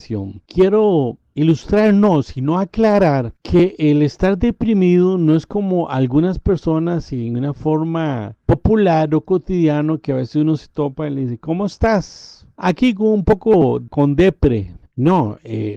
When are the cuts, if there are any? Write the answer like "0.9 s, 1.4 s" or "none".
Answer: 14.9 s